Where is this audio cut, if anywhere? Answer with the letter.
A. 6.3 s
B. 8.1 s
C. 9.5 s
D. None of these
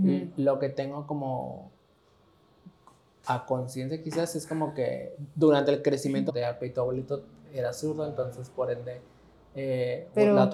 A